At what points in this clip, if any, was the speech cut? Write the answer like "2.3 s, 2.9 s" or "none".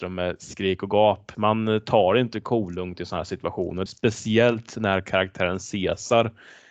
1.3 s, 3.9 s